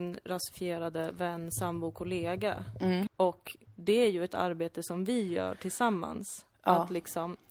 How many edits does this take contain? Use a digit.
1